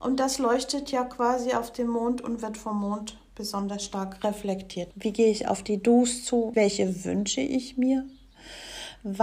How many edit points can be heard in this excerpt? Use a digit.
2